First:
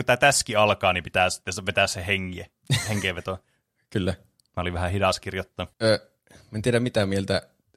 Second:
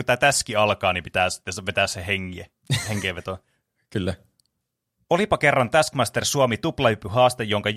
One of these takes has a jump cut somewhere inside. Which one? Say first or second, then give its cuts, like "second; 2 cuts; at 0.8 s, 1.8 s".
first; 2 cuts; at 4.5 s, 5.7 s